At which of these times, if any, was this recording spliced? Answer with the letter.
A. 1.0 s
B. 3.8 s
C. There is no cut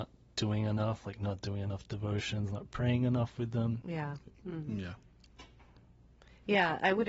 B